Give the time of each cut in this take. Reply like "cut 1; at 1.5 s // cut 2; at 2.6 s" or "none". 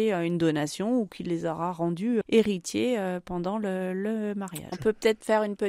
cut 1; at 2.2 s // cut 2; at 4.7 s